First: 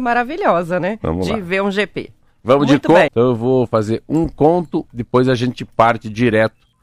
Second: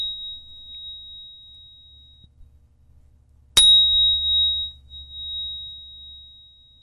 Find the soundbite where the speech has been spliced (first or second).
first